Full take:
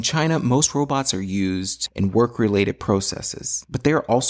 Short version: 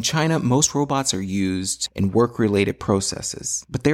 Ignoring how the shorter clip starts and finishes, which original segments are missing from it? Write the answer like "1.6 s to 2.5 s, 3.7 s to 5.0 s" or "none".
none